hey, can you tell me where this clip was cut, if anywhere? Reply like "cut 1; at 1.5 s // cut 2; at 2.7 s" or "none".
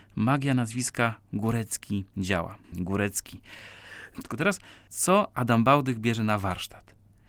cut 1; at 2.6 s // cut 2; at 4.2 s